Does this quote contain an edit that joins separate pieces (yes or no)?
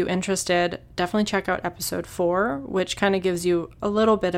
no